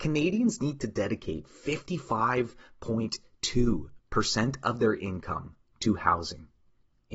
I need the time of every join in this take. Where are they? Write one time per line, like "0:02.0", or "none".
none